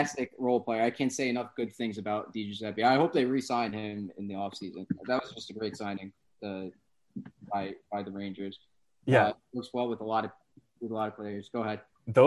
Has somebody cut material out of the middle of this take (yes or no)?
no